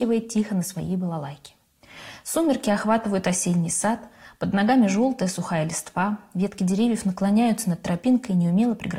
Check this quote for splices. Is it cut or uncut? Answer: uncut